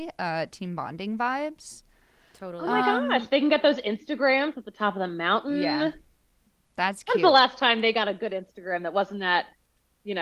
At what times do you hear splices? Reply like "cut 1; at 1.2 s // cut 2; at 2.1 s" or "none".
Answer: none

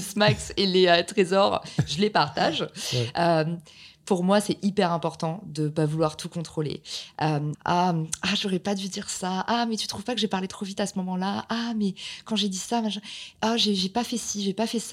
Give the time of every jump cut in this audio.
cut 1; at 7.5 s

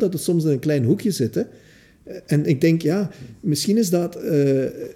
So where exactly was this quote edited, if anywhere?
none

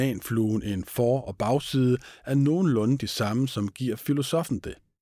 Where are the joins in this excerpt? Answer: none

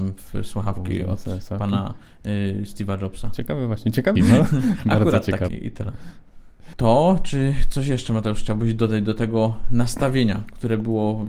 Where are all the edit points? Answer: cut 1; at 4.2 s // cut 2; at 5.5 s // cut 3; at 6.7 s

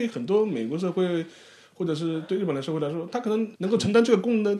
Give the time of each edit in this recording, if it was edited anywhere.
cut 1; at 3.6 s

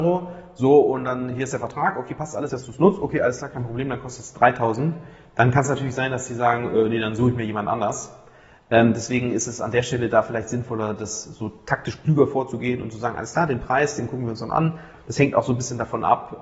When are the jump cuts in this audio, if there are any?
cut 1; at 2.5 s

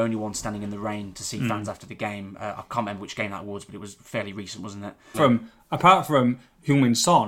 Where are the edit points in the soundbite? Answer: cut 1; at 5.1 s

